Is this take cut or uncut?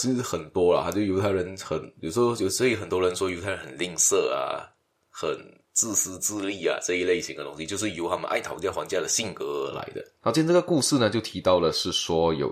cut